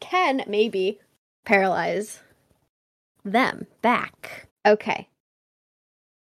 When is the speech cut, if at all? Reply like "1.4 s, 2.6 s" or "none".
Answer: 4.5 s